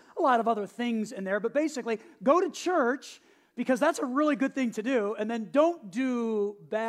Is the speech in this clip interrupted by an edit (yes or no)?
no